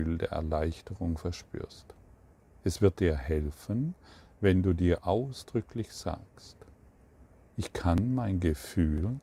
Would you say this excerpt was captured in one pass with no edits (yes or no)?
yes